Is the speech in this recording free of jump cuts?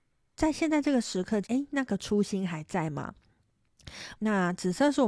no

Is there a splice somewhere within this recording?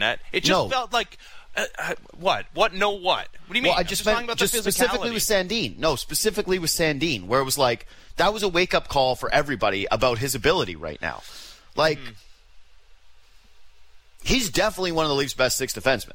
no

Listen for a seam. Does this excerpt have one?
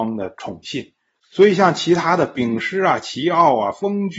yes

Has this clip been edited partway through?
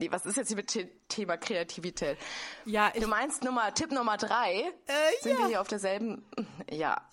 no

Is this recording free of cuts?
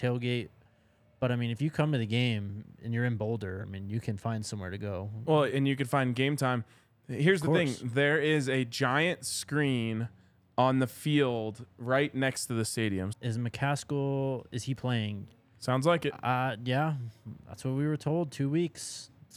no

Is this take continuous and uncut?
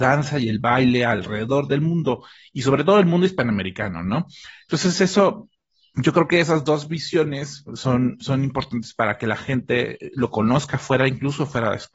yes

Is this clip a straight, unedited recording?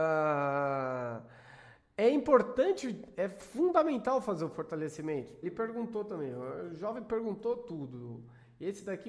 no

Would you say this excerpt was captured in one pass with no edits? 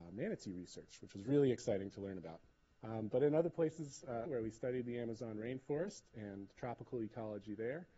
no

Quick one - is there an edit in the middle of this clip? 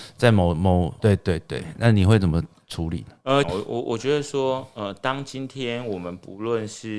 yes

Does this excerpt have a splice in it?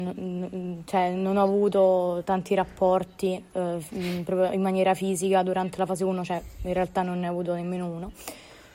no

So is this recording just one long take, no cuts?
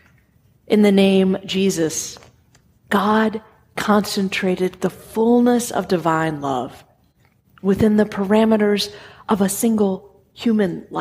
yes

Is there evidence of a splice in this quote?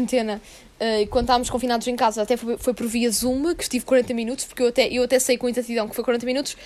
no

